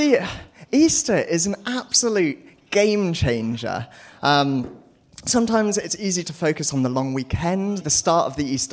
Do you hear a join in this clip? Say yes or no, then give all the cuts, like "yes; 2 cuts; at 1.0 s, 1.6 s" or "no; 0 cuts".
yes; 2 cuts; at 6.2 s, 7.8 s